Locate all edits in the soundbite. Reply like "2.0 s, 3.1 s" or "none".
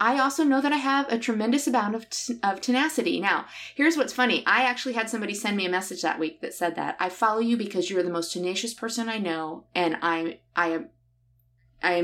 none